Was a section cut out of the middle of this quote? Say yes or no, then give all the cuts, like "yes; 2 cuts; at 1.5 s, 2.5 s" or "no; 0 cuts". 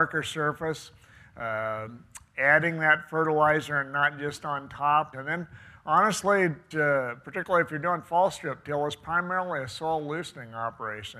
yes; 2 cuts; at 5.1 s, 6.7 s